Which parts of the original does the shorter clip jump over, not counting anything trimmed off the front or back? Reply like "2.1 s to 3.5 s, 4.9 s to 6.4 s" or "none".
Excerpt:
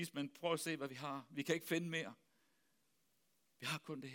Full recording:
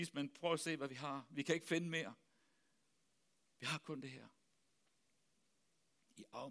none